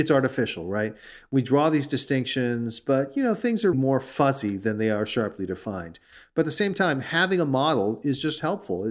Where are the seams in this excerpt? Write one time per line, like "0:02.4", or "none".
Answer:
0:03.7